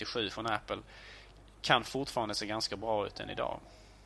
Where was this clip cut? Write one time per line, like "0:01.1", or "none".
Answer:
none